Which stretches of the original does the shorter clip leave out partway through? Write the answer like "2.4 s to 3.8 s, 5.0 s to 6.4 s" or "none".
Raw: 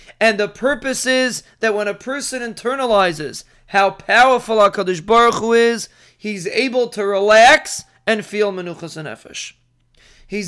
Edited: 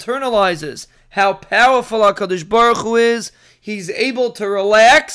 none